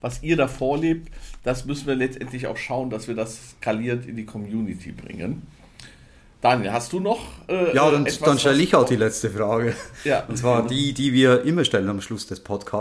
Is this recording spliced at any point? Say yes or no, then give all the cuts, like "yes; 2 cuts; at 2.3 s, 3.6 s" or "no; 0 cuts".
no; 0 cuts